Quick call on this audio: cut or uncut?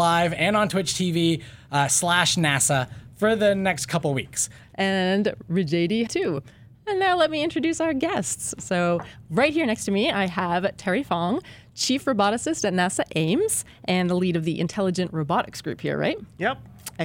cut